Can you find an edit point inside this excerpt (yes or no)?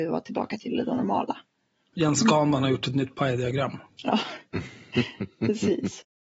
yes